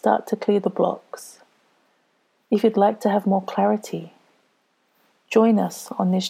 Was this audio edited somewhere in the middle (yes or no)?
no